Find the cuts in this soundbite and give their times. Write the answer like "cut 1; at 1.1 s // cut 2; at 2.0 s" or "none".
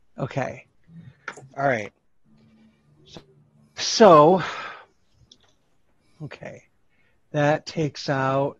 cut 1; at 1.5 s // cut 2; at 3.8 s